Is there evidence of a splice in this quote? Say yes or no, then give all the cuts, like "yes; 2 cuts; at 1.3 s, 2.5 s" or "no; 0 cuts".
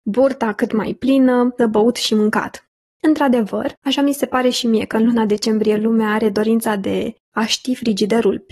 yes; 2 cuts; at 1.6 s, 2.9 s